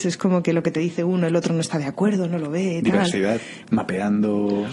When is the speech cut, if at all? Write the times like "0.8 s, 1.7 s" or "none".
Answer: 3.6 s